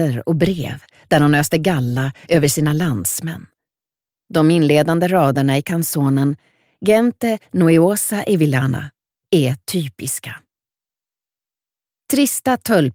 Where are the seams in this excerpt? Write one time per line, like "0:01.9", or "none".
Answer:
0:09.2